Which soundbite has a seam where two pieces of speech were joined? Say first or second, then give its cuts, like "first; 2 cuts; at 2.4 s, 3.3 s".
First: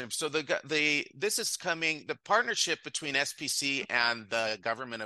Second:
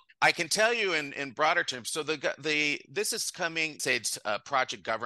second; 1 cut; at 3.8 s